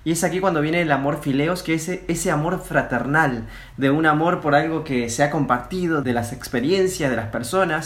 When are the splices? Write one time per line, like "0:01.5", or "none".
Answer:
0:03.7